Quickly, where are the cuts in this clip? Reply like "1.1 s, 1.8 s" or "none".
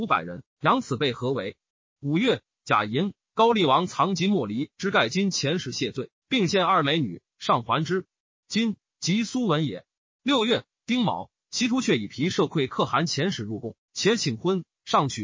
1.9 s